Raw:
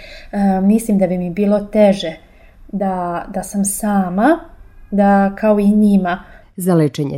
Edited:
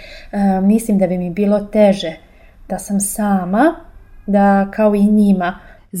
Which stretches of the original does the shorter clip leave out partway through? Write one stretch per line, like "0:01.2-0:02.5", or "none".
0:02.7-0:03.3